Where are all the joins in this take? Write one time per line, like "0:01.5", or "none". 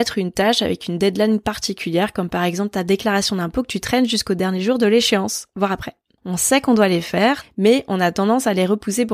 0:06.2
0:07.4